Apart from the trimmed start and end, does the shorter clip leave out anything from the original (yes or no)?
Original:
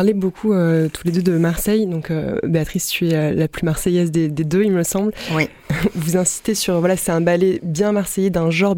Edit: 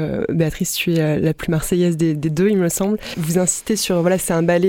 yes